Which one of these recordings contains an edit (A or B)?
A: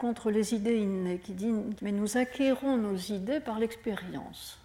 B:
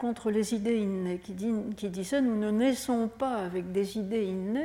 A